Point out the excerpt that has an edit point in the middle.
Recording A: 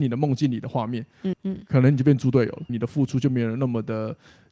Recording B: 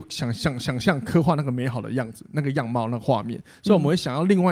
A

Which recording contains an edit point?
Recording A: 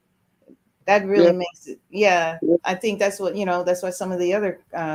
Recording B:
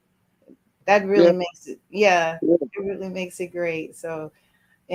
A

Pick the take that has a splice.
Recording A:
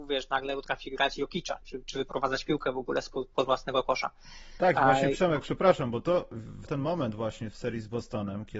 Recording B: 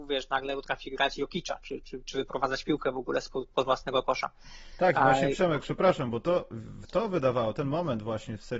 A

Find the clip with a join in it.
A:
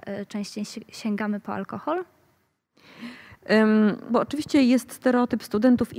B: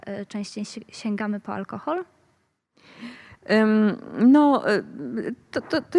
A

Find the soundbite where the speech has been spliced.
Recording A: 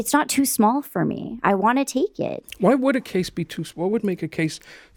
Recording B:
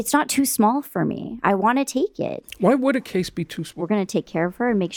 B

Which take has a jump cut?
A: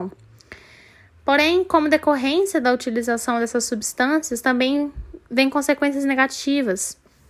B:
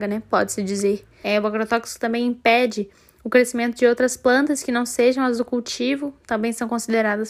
B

